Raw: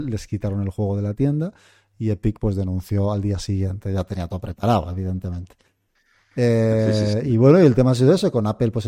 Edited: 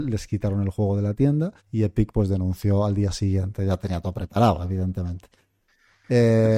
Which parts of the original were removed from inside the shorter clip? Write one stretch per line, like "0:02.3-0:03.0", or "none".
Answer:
0:01.6-0:01.9